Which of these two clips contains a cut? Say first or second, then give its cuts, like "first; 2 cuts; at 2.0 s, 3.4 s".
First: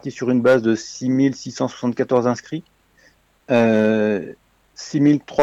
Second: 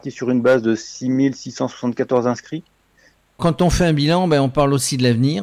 second; 1 cut; at 3.4 s